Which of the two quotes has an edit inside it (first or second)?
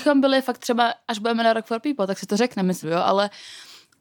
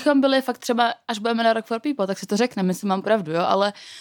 first